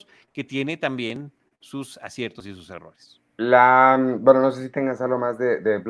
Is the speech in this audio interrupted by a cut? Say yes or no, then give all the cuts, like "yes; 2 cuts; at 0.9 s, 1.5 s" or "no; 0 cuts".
yes; 1 cut; at 3.3 s